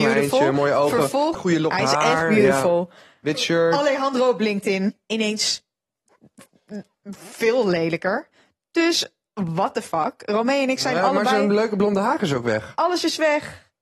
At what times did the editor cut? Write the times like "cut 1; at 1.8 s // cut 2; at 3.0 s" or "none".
cut 1; at 1.3 s